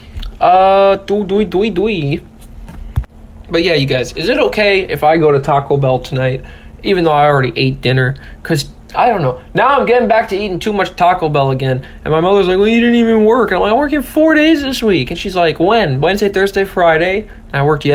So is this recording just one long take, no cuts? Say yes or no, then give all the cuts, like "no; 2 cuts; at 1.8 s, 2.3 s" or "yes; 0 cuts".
yes; 0 cuts